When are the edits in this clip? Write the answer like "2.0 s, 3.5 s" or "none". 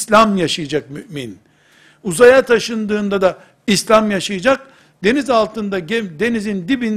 none